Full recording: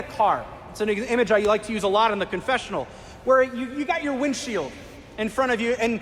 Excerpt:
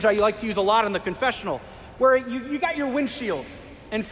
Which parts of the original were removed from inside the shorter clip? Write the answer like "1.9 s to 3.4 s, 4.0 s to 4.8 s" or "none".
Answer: none